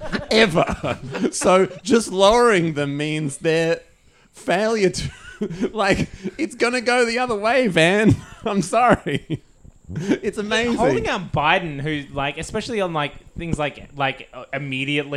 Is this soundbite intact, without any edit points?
yes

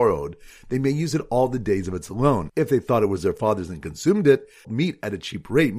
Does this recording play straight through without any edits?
no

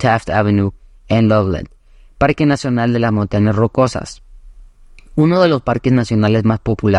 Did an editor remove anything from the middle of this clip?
no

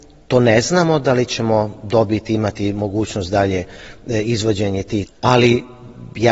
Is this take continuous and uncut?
no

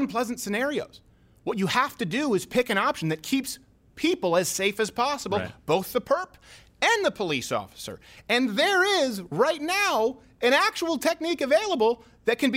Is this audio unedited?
yes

